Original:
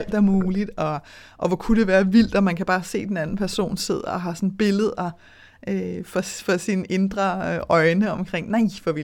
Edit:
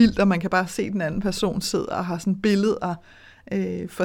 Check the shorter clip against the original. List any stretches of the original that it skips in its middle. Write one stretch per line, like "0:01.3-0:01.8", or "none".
none